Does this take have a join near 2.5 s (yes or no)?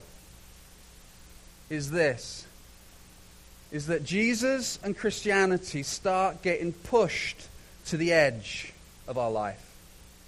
no